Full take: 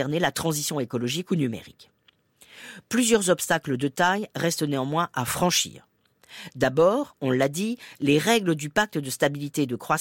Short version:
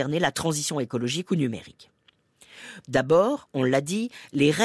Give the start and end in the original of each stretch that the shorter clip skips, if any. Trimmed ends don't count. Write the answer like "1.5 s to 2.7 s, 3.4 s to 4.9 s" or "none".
2.8 s to 6.5 s